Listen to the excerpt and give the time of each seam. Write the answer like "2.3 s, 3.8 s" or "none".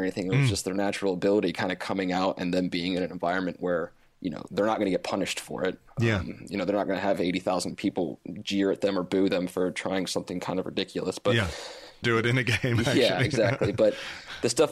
12.0 s